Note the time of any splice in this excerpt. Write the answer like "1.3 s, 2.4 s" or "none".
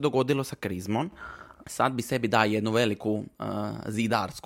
1.6 s